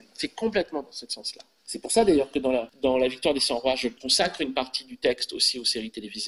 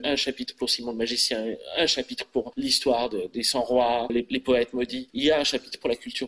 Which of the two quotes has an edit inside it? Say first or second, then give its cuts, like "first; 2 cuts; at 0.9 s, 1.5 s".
second; 1 cut; at 4.1 s